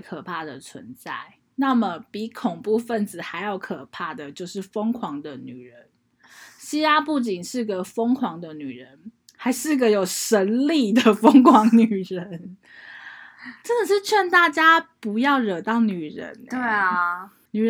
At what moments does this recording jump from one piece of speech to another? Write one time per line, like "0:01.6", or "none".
none